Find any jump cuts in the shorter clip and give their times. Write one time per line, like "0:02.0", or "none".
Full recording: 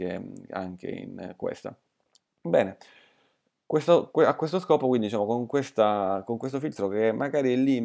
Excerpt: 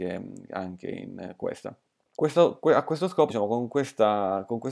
0:02.1
0:03.3